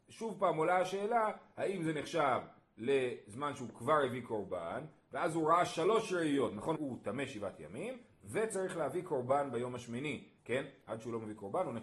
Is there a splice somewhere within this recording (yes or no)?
yes